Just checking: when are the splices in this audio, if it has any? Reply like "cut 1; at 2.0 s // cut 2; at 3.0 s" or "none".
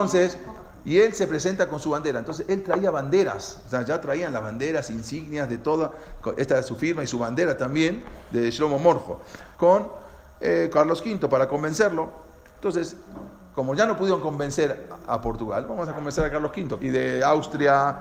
cut 1; at 9.6 s // cut 2; at 16.8 s